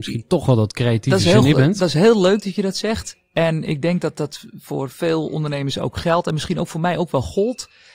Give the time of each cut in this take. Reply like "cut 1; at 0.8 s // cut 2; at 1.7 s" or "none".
none